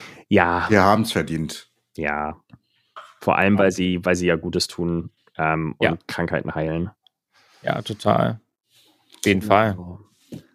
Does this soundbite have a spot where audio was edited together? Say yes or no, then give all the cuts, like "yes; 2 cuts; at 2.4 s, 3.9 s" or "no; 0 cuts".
no; 0 cuts